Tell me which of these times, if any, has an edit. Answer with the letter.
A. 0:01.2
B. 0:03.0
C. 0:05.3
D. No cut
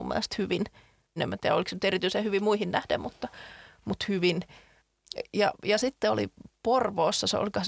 A